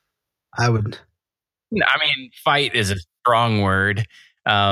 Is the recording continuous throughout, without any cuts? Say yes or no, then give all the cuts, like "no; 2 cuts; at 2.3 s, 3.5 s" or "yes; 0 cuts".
yes; 0 cuts